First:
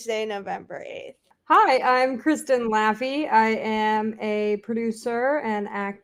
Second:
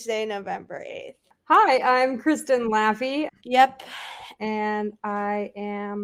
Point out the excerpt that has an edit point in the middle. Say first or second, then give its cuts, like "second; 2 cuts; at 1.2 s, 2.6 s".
second; 2 cuts; at 3.3 s, 4.4 s